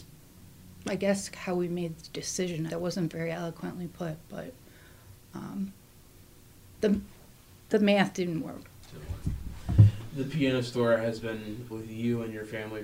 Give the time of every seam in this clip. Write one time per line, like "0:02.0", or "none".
0:02.7
0:11.7